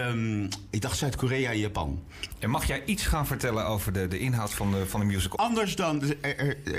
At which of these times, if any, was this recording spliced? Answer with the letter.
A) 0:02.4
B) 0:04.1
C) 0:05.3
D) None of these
C